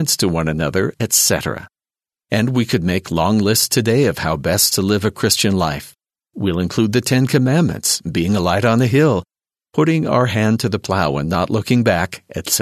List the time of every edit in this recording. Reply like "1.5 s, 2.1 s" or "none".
0.9 s